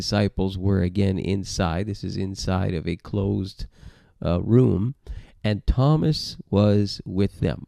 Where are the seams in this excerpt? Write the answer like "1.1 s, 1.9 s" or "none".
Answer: none